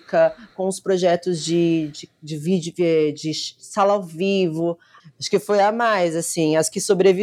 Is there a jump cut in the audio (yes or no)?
yes